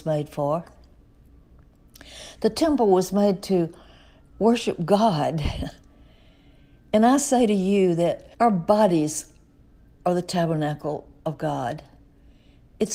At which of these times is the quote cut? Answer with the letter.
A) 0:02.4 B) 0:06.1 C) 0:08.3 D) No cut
C